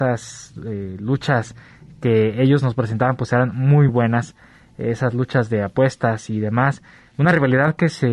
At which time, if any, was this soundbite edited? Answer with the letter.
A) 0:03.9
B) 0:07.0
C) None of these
A